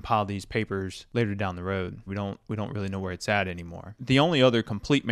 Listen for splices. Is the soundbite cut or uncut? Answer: cut